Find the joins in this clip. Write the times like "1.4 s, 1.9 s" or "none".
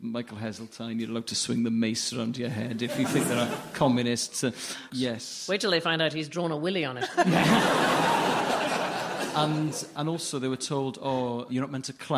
4.9 s

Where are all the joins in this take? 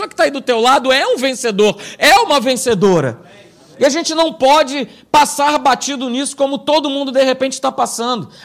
none

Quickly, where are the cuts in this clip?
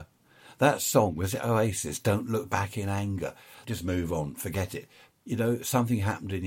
3.6 s, 5.1 s

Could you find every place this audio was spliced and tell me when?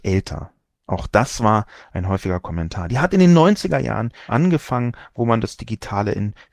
2.9 s, 4.3 s

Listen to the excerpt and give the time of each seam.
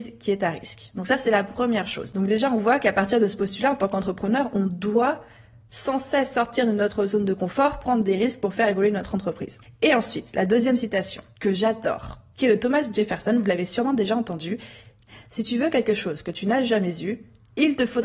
none

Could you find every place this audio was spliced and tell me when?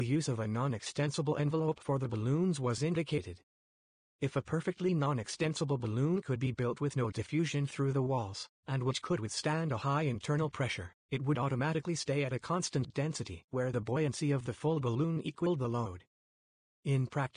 none

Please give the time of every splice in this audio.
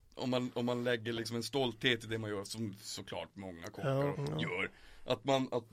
4.1 s

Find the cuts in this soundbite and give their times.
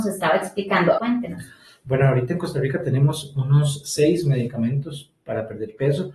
1.0 s

